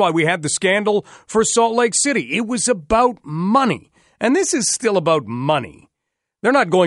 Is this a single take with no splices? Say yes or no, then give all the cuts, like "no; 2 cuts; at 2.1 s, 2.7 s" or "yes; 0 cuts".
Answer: yes; 0 cuts